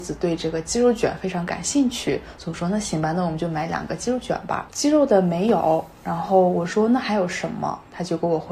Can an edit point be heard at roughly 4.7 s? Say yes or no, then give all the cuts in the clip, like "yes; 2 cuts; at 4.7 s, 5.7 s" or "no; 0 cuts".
yes; 1 cut; at 4.7 s